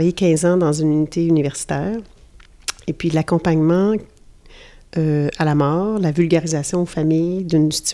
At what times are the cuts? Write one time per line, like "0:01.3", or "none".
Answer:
none